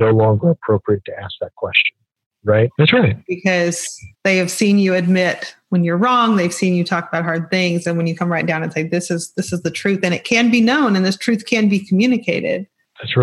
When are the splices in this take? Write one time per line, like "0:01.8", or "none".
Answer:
0:02.8
0:04.1